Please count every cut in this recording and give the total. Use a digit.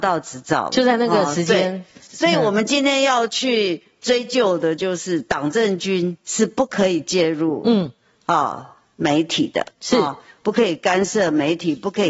0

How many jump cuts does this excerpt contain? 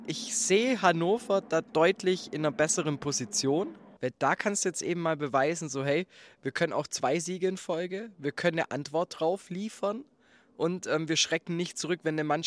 1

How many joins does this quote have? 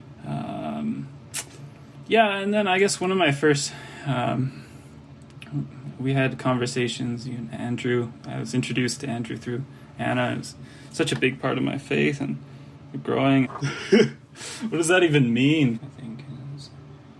2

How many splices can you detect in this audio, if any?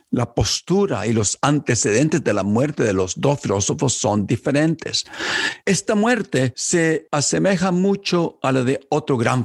1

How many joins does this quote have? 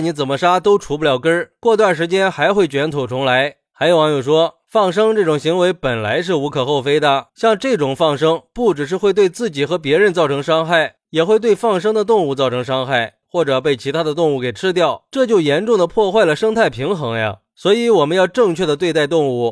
2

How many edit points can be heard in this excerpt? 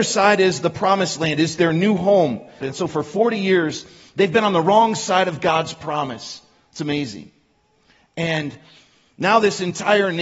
1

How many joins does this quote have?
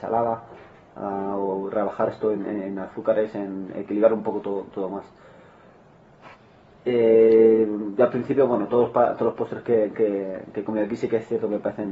0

